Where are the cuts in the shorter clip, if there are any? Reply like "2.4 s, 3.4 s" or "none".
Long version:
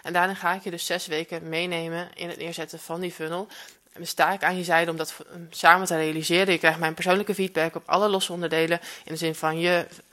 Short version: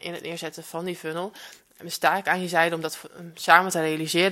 none